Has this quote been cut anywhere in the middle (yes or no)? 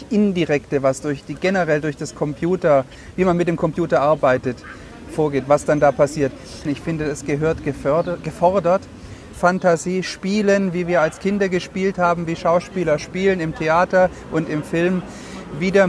yes